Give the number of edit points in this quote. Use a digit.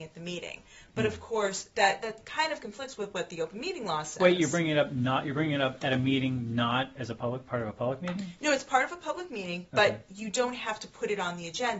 0